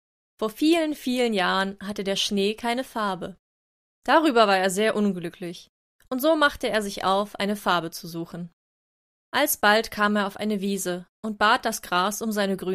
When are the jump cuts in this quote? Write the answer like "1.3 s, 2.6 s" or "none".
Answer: none